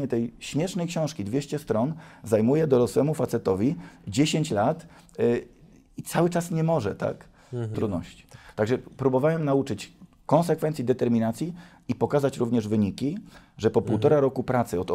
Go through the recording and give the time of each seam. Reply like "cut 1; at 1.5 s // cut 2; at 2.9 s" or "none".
cut 1; at 7.7 s